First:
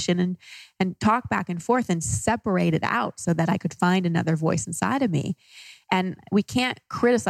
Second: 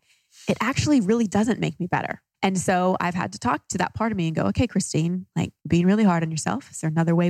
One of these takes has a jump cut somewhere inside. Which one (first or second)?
second